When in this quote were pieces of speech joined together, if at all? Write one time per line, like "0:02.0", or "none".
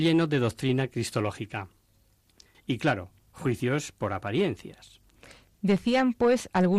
0:02.5

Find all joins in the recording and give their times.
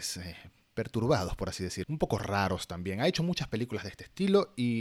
0:01.8

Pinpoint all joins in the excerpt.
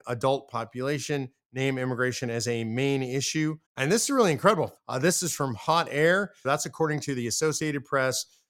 0:03.6
0:04.8
0:06.4

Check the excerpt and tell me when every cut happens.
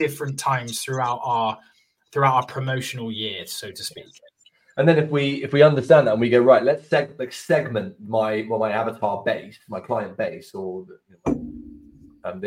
none

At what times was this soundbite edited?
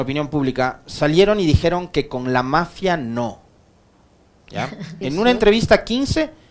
0:05.0

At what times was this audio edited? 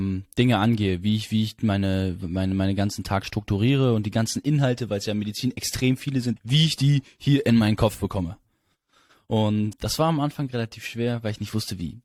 0:06.4
0:09.7

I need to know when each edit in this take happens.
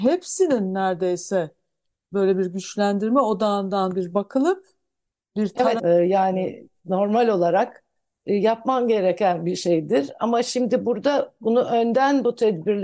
0:05.8

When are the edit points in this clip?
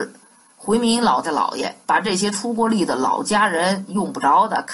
0:01.2

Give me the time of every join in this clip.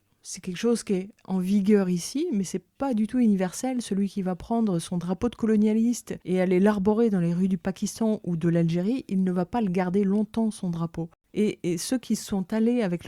none

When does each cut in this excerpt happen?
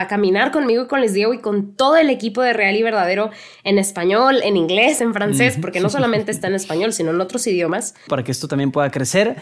0:05.0
0:08.1

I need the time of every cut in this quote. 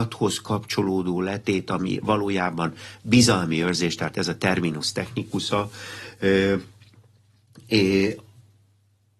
none

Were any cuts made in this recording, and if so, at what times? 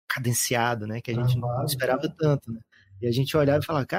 none

